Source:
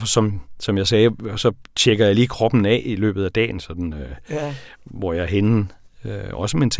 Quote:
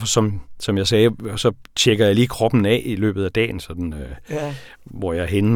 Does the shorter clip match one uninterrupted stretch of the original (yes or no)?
yes